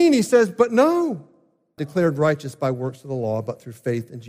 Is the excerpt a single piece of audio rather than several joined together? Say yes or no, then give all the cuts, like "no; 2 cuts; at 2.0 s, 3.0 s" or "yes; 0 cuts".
no; 1 cut; at 1.8 s